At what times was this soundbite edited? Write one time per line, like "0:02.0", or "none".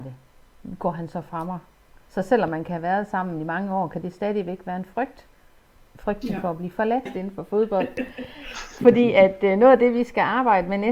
0:07.1